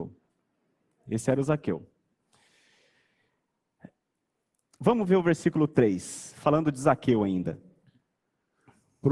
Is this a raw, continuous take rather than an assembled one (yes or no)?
yes